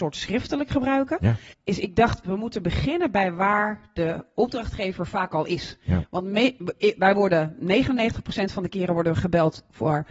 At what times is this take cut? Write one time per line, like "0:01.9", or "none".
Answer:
0:01.5